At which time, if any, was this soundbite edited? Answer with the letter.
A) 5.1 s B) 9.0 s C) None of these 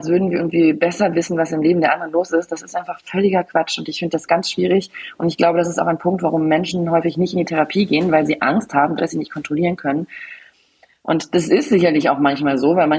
B